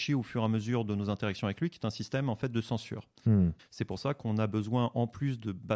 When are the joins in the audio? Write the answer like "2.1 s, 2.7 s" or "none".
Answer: 3.6 s